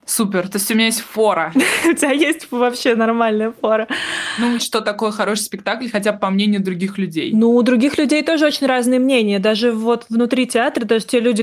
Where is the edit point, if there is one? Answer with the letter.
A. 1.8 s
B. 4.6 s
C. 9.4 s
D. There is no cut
B